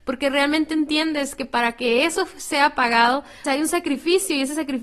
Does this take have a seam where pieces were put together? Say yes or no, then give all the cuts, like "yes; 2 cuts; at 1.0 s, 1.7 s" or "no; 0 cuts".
yes; 1 cut; at 3.4 s